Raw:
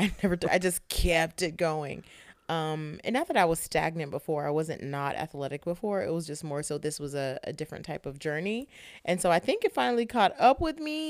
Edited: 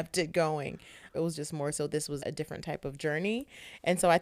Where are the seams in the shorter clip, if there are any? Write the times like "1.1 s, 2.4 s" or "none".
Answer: 1.1 s, 2.2 s